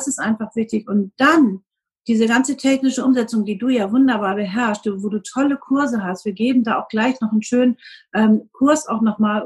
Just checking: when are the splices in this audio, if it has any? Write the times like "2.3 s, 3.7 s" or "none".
none